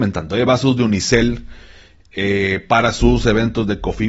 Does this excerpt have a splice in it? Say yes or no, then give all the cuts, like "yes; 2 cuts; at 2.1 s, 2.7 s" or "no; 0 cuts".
no; 0 cuts